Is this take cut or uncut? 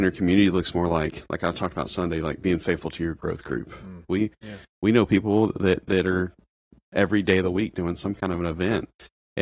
cut